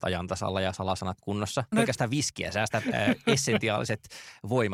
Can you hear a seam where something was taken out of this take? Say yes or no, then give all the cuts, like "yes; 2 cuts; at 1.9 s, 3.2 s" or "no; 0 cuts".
yes; 1 cut; at 1.7 s